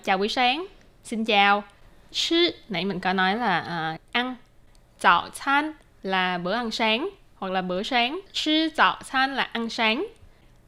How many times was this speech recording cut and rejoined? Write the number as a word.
one